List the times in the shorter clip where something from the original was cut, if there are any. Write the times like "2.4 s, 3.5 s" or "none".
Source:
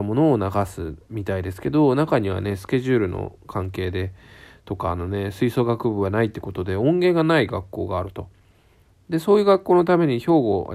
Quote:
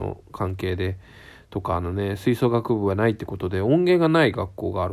none

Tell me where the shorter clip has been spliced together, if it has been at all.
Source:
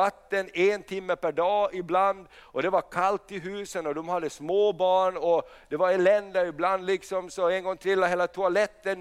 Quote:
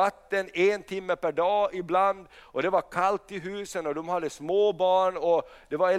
none

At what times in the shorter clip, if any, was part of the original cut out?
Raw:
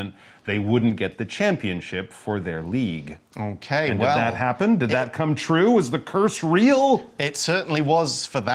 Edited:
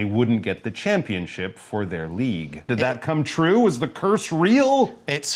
2.7 s

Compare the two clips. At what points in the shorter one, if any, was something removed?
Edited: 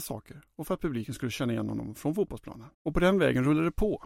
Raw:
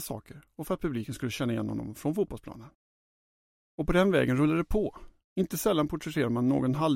2.7 s

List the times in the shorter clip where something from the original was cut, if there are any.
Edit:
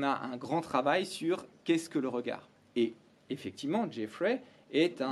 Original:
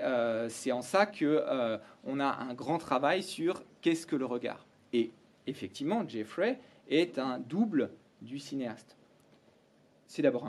none

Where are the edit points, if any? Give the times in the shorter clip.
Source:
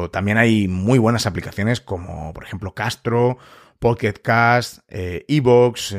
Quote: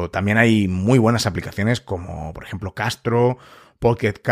none

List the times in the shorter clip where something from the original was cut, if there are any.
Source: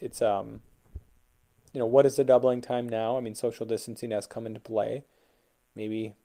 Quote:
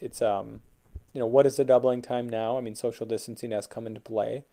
1.1 s

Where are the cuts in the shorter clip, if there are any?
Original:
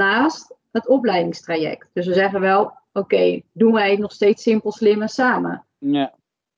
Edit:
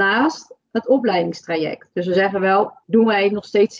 2.8 s

